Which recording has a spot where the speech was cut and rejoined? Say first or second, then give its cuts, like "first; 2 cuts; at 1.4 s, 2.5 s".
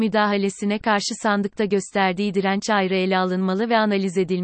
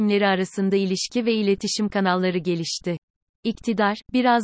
second; 1 cut; at 3.4 s